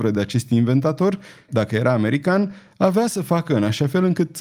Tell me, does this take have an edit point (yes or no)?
yes